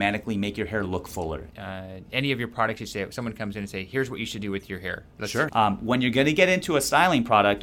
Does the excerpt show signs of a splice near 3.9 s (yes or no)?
no